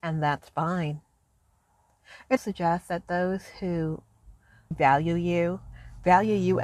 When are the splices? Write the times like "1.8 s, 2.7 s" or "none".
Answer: 2.4 s, 4.7 s